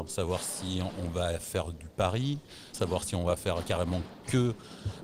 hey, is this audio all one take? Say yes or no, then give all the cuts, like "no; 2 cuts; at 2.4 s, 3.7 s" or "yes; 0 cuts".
no; 1 cut; at 2.7 s